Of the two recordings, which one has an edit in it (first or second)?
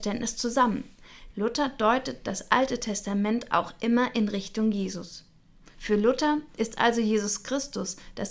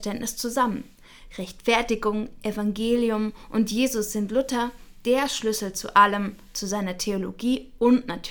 first